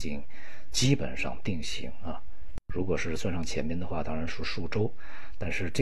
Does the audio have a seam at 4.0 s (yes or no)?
no